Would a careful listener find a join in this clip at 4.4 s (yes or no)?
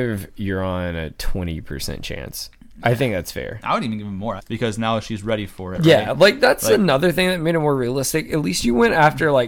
yes